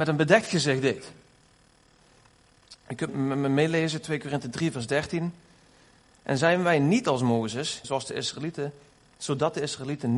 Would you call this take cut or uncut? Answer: cut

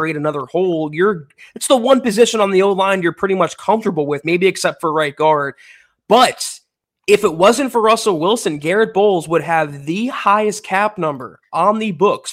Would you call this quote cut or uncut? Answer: uncut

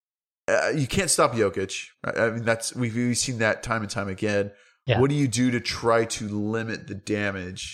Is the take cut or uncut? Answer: uncut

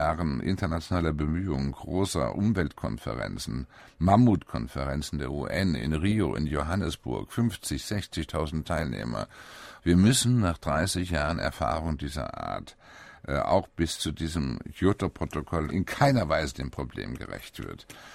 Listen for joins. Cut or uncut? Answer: cut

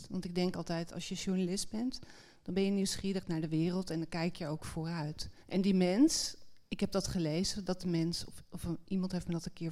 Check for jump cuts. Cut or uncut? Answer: cut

